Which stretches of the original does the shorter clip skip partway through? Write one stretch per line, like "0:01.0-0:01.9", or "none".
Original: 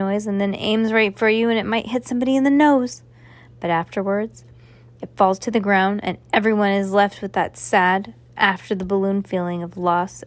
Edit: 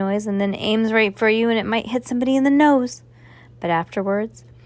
none

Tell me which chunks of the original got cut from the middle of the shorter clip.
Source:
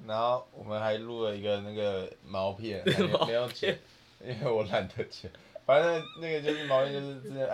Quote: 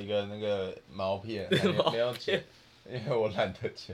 none

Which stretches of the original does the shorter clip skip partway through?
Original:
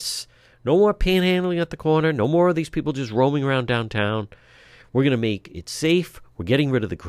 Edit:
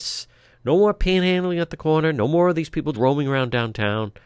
0:02.9-0:03.1

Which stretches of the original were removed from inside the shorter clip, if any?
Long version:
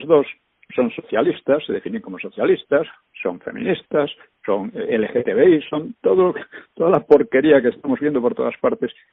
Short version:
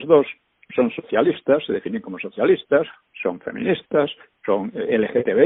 none

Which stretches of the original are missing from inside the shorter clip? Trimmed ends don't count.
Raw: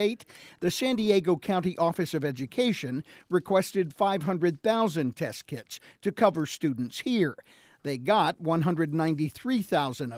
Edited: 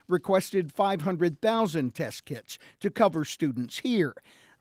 none

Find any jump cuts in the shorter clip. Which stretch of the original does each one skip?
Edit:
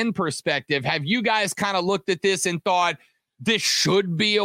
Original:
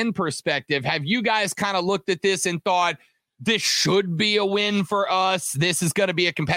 none

